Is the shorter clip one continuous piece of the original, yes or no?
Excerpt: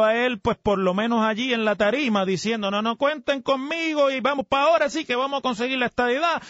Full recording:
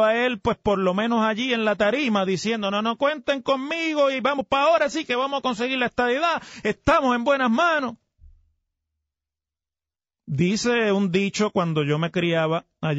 yes